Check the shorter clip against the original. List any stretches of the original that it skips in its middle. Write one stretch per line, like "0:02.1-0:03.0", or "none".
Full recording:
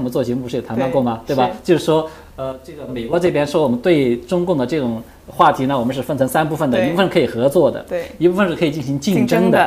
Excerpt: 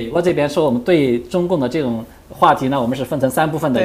none